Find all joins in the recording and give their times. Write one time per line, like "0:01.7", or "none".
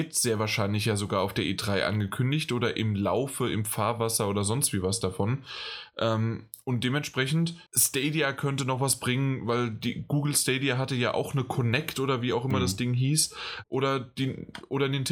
0:07.7
0:13.6